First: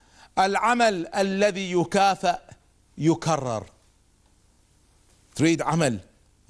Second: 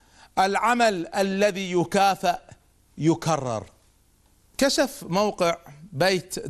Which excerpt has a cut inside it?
second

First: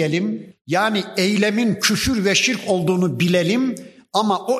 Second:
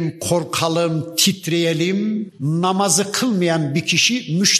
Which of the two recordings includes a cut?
second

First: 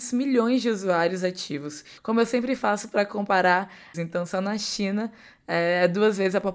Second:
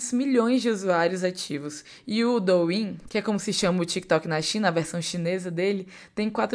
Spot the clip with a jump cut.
first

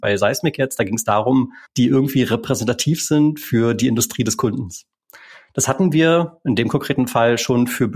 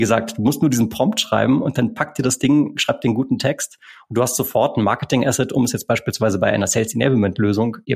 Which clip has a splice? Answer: first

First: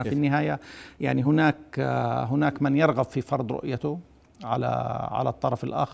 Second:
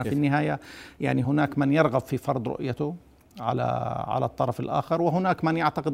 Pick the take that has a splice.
second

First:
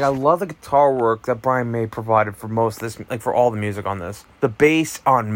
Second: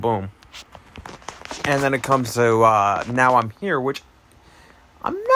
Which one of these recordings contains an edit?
first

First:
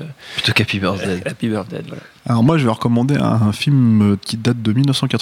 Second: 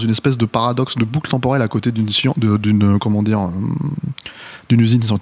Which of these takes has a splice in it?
first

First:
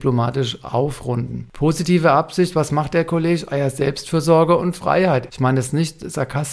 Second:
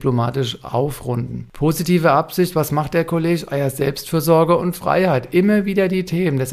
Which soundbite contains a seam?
first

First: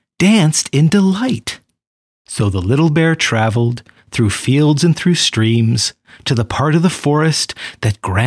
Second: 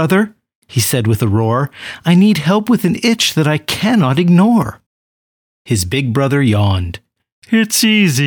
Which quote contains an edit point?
first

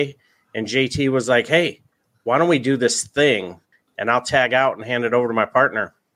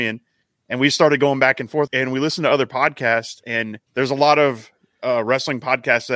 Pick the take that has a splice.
second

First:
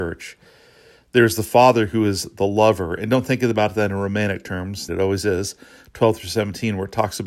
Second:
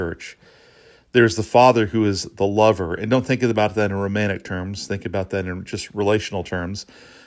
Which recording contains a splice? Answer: first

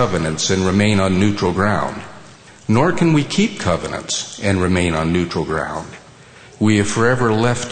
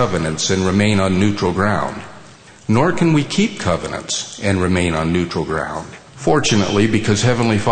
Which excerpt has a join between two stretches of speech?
second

